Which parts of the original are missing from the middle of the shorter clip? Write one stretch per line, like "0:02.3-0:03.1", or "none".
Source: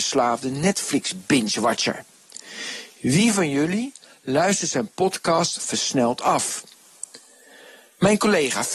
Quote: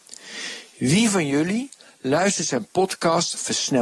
none